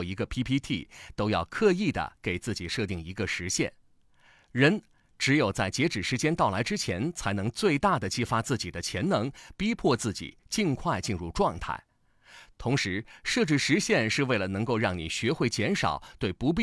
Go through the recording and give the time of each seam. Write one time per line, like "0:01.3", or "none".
none